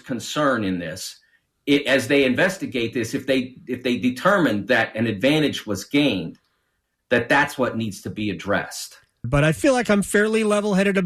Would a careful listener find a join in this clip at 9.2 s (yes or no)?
yes